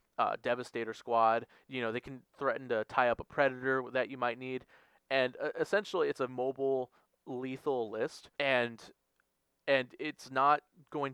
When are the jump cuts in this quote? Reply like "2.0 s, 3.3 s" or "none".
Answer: 6.3 s, 8.3 s